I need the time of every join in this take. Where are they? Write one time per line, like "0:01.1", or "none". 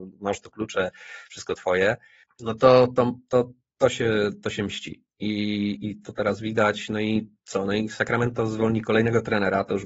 none